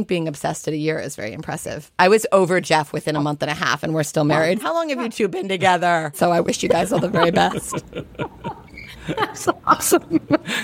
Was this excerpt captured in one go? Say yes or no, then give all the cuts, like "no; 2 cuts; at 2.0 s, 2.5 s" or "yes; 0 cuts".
no; 2 cuts; at 4.6 s, 6.1 s